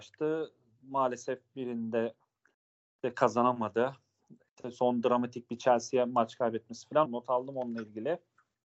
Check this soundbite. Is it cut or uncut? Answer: cut